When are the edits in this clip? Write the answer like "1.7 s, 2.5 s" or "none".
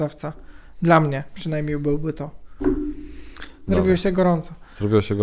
3.7 s